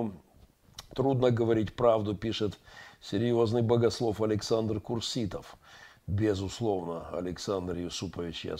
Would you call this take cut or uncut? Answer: uncut